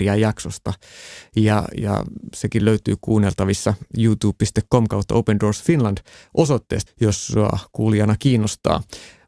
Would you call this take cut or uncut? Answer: cut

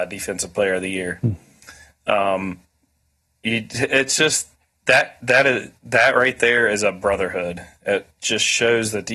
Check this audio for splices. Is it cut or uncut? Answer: uncut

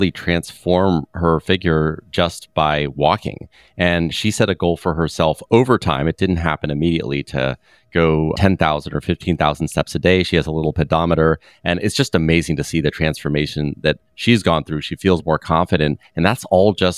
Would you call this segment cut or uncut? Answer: uncut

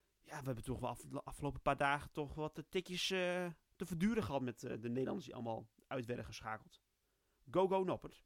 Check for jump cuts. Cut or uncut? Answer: uncut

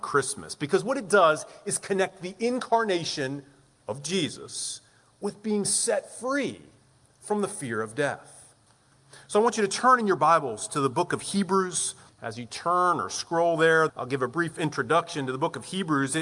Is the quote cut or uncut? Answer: cut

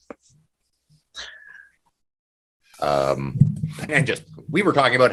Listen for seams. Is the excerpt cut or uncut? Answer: cut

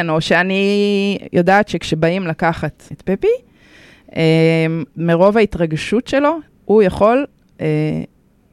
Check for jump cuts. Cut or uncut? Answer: cut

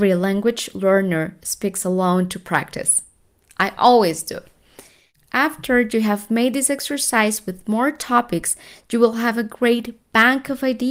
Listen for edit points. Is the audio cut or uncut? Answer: uncut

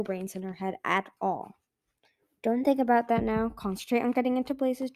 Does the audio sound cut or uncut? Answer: uncut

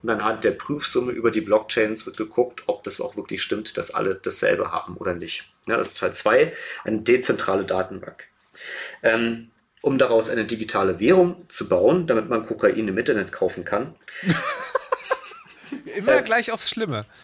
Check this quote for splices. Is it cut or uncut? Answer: cut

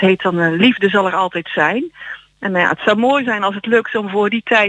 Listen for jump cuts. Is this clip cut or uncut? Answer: uncut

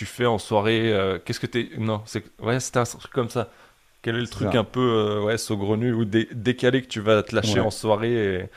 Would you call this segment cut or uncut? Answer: uncut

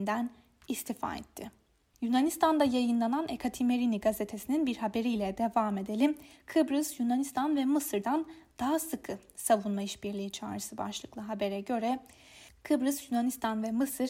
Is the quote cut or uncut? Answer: uncut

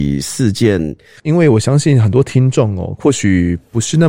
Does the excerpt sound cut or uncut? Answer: cut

